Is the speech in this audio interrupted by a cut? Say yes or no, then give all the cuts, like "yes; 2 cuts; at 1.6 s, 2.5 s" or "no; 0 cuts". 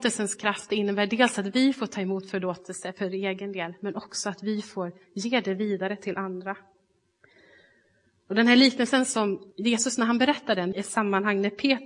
yes; 2 cuts; at 9.5 s, 10.7 s